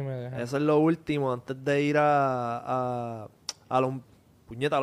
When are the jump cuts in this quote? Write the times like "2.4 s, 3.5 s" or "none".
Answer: none